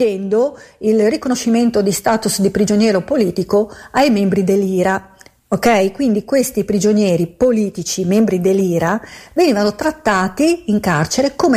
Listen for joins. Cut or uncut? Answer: uncut